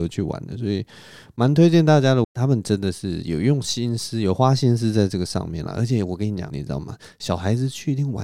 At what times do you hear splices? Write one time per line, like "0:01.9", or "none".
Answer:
0:02.2
0:06.5